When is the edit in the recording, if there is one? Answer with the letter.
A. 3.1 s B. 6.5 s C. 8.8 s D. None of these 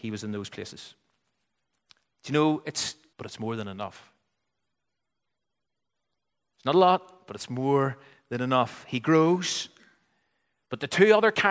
A